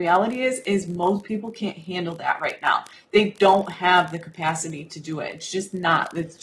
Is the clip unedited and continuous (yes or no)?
yes